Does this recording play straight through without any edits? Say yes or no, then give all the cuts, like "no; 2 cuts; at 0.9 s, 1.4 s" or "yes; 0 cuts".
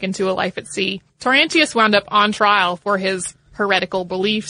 no; 1 cut; at 1.1 s